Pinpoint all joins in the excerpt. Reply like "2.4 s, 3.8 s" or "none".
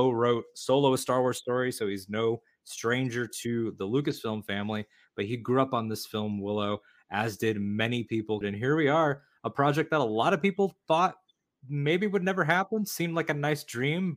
8.4 s